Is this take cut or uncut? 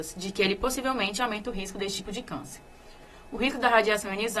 uncut